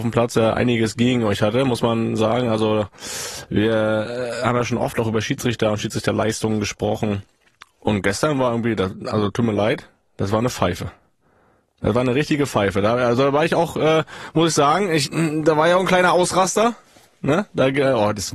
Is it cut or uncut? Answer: uncut